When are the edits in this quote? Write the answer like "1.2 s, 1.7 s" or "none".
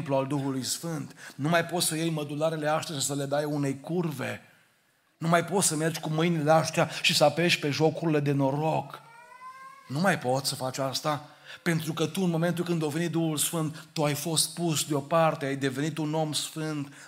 none